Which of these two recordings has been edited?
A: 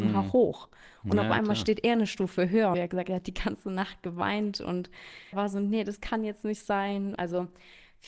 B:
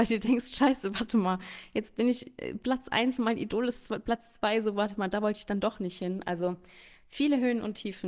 A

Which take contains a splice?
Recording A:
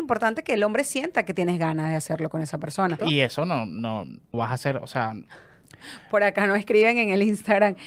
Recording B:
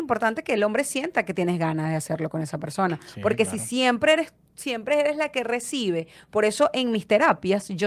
A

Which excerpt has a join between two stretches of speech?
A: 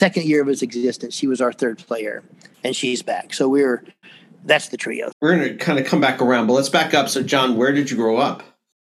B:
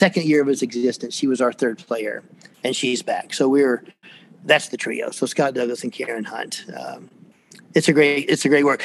A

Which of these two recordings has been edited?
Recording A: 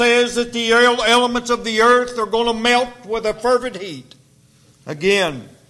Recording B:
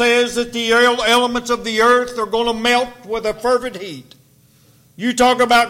A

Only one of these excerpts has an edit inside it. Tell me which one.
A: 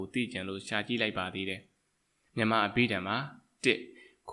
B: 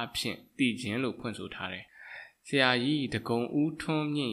B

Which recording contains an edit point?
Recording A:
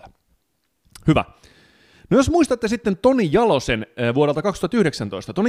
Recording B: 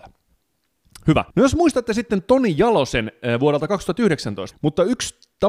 B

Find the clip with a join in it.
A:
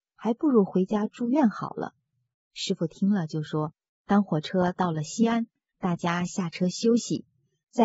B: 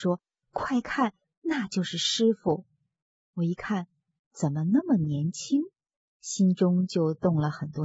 A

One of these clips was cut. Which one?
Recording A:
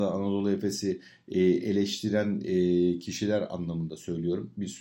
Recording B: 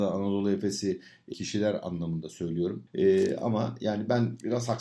B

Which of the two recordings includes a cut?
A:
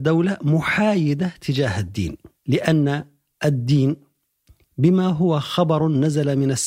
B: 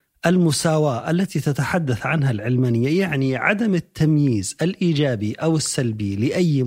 A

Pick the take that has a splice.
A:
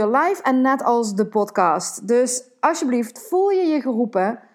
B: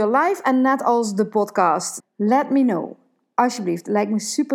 B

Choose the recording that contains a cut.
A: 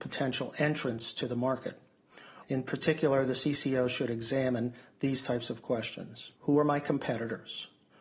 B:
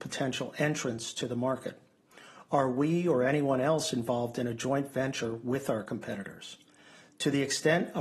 A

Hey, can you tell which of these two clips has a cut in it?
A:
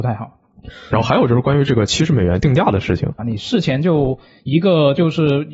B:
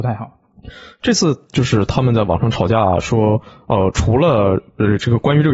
A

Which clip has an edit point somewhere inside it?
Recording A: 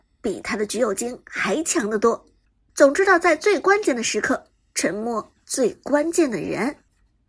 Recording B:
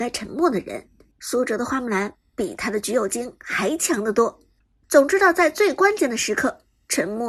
B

